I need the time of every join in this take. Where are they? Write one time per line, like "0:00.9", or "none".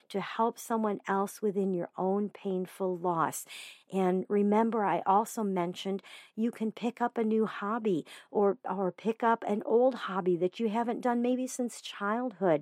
none